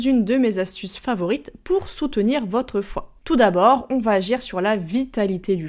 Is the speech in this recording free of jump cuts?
no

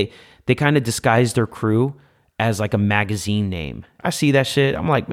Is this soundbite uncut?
no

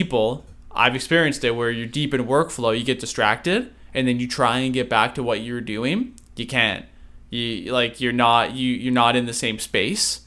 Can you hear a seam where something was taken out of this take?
no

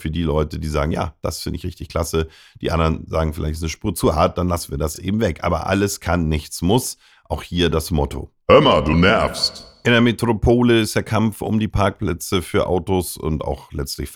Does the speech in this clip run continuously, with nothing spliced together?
yes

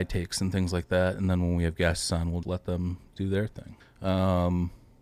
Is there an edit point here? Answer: yes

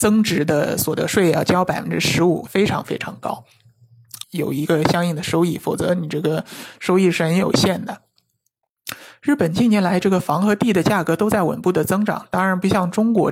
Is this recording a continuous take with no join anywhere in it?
no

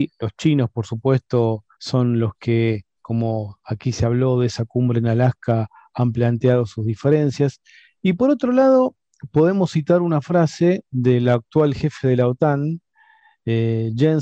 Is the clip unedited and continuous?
no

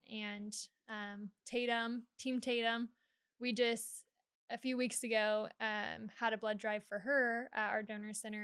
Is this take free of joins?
yes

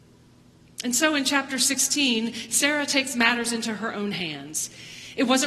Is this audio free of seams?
yes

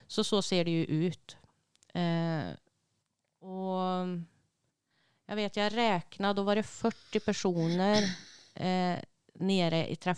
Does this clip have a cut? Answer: no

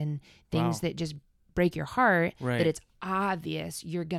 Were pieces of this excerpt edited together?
no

